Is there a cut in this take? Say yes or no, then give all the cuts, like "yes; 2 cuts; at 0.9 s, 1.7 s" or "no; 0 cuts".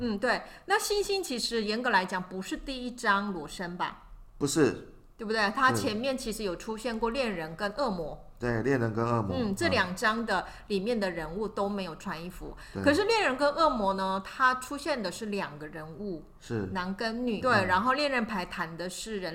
yes; 1 cut; at 17.4 s